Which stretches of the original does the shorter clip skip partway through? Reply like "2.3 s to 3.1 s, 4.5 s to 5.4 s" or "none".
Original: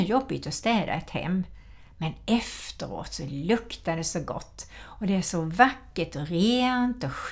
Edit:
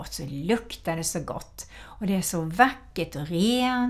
none